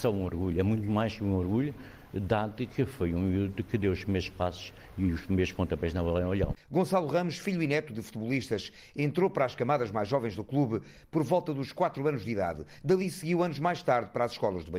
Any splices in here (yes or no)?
yes